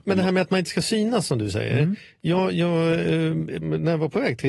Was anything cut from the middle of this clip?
no; 0 cuts

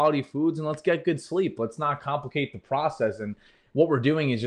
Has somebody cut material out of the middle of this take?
no; 0 cuts

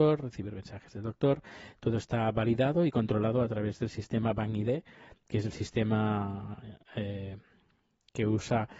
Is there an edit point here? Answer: yes; 1 cut; at 1.7 s

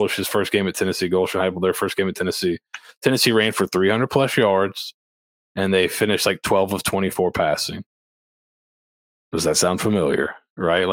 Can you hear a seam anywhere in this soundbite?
no; 0 cuts

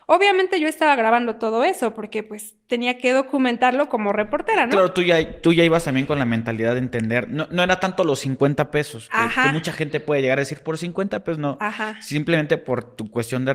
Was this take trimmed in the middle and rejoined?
no; 0 cuts

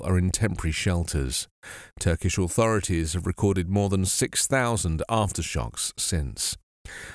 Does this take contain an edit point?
no; 0 cuts

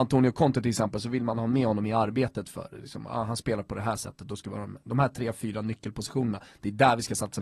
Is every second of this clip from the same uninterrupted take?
no; 1 cut; at 4.8 s

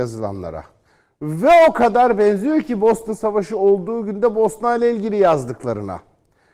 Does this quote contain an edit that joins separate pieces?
no; 0 cuts

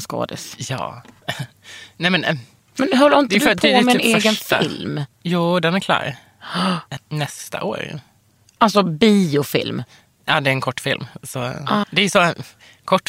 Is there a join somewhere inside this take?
yes; 2 cuts; at 7.0 s, 11.8 s

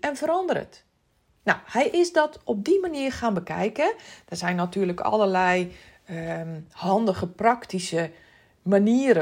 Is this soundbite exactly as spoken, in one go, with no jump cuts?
yes; 0 cuts

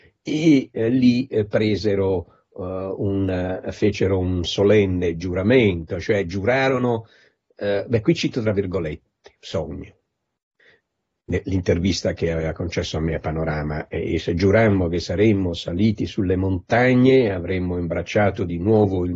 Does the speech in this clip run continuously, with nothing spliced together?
yes; 0 cuts

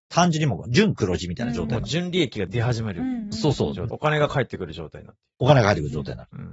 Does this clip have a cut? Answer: yes; 1 cut; at 3.9 s

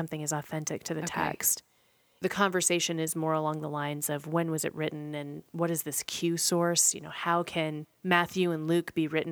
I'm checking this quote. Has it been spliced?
no; 0 cuts

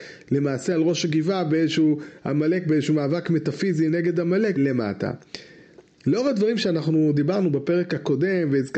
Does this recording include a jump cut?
yes; 1 cut; at 4.6 s

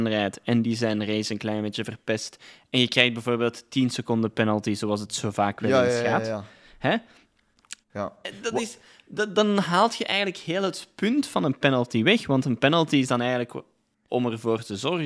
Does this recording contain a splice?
yes; 1 cut; at 7.8 s

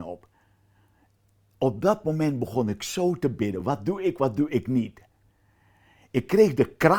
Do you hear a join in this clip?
no; 0 cuts

